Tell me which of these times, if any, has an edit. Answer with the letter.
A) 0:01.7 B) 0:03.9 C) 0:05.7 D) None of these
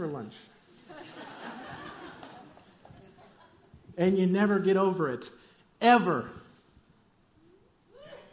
B